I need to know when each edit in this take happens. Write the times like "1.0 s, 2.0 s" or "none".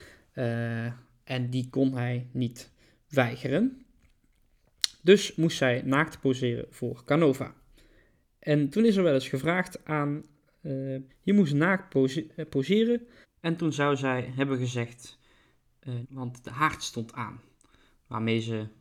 11.1 s, 13.2 s, 16.0 s

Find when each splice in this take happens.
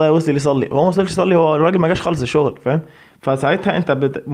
none

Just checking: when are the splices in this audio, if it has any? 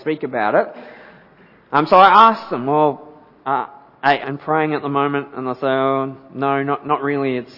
4.2 s

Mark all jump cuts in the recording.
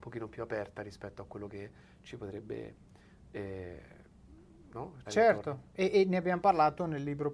5.0 s

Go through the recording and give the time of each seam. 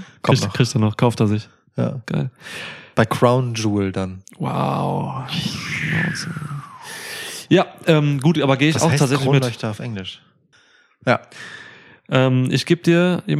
10.5 s

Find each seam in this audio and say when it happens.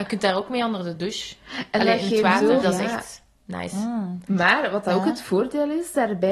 2.6 s, 4.3 s

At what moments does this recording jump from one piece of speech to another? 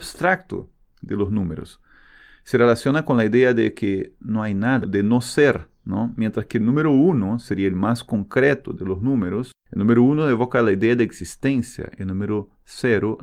4.8 s

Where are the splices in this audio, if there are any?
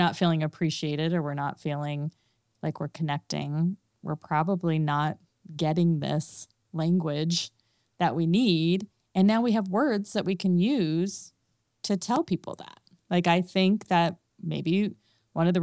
none

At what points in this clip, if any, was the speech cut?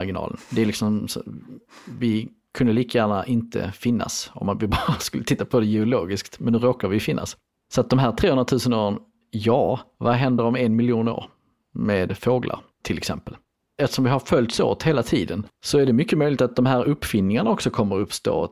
none

